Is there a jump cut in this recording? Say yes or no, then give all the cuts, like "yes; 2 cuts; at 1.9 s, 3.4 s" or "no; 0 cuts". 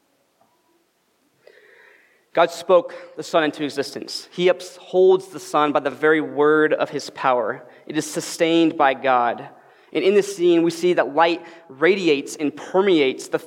no; 0 cuts